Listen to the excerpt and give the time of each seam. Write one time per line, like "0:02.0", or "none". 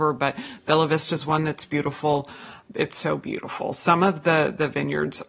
0:02.7